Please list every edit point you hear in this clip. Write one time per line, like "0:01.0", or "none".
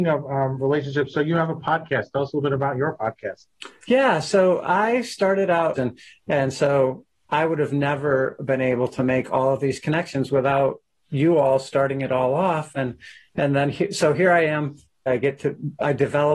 0:05.8
0:15.1